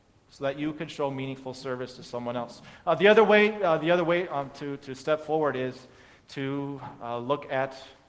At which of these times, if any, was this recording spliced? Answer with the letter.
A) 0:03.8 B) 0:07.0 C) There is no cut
C